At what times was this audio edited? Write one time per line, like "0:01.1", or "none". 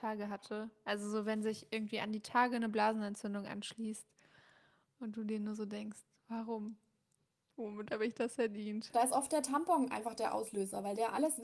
none

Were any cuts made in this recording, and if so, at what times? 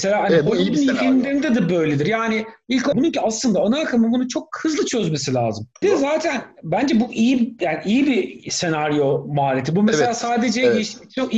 0:02.9
0:05.8

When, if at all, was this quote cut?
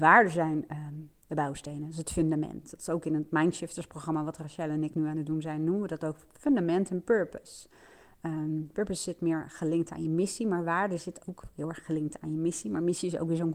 none

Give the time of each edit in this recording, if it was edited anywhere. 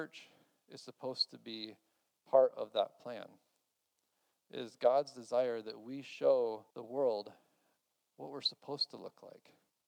0:06.7

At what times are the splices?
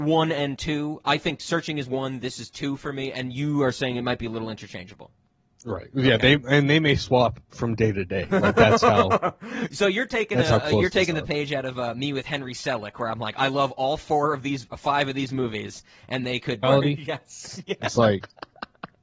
0:16.6

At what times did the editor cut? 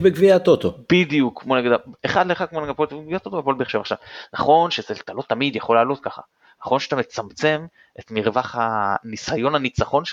none

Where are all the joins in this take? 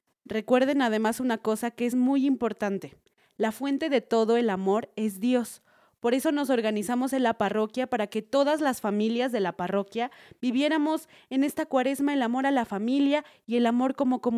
none

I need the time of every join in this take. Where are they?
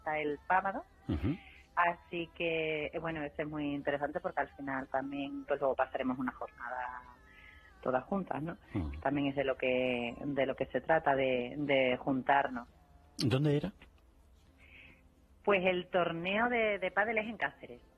0:05.5

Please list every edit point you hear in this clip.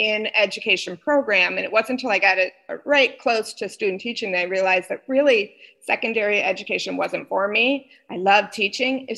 none

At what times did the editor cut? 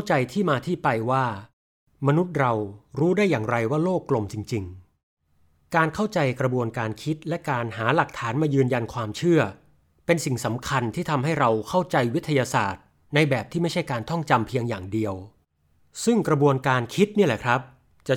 none

